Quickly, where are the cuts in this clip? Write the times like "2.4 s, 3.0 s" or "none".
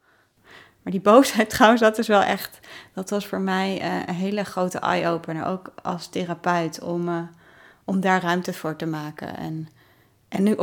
none